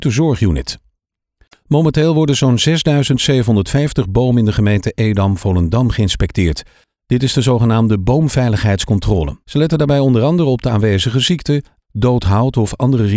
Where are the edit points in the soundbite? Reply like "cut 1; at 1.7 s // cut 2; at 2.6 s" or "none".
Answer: cut 1; at 9.4 s // cut 2; at 11.8 s